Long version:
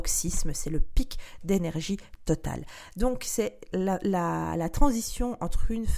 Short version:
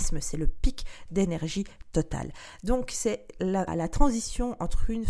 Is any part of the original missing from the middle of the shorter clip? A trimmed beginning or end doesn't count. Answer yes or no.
yes